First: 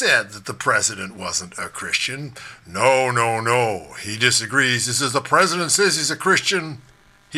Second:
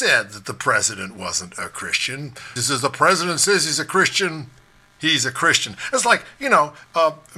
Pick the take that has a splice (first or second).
second